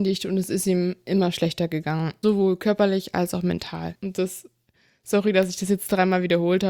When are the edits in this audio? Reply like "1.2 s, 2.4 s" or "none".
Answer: 4.0 s